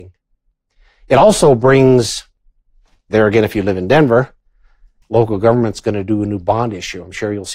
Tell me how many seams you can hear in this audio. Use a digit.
1